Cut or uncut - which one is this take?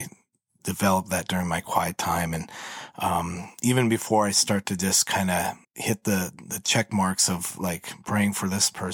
cut